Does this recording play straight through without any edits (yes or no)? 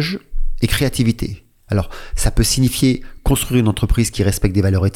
yes